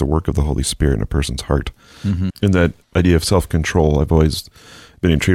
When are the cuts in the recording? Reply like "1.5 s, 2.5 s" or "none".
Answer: 2.3 s